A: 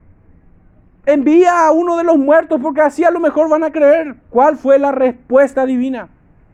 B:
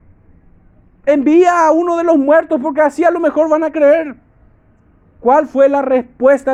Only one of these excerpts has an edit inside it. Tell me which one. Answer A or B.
A